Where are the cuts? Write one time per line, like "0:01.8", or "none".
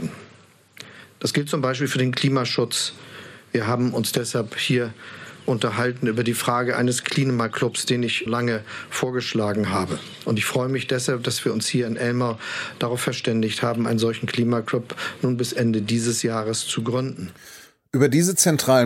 0:08.3